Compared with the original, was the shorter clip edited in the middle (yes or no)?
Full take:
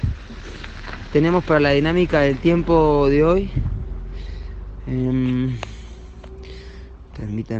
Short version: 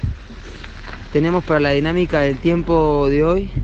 no